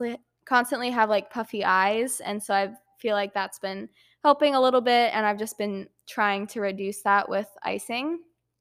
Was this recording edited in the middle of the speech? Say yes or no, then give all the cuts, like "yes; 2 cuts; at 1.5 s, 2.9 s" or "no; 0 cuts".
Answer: no; 0 cuts